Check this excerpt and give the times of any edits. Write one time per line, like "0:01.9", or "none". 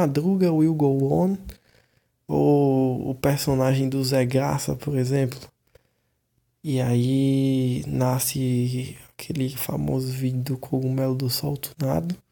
none